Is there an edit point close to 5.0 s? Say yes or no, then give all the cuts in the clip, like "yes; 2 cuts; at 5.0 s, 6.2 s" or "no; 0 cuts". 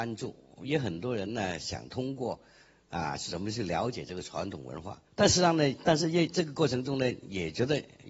yes; 1 cut; at 5.0 s